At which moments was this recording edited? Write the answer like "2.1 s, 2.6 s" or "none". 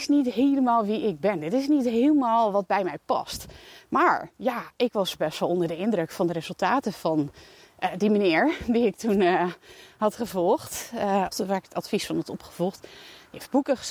11.3 s